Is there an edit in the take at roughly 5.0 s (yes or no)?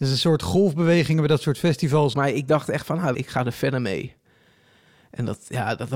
no